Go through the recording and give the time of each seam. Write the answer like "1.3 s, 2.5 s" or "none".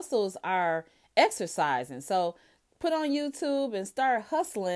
none

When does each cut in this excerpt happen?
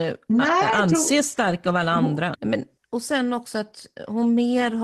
2.3 s

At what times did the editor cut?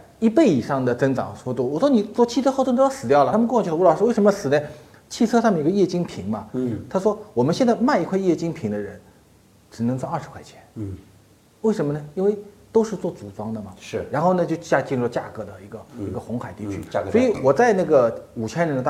none

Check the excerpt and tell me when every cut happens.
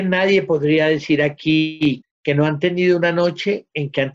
2.0 s

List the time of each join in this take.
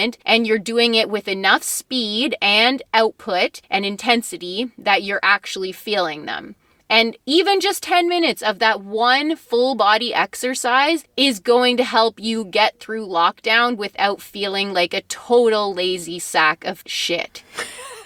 none

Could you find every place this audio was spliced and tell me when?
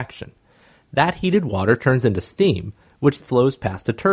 3.2 s

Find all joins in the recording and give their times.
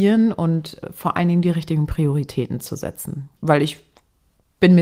3.4 s

